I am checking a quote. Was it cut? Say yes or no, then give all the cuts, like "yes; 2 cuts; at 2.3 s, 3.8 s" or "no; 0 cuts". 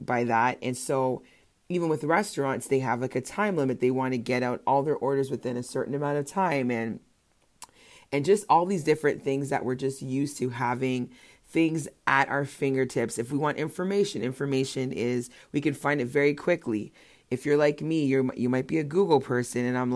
no; 0 cuts